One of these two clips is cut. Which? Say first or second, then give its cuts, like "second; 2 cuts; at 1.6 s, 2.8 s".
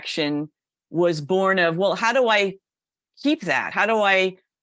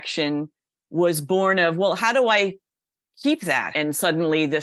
second; 1 cut; at 3.7 s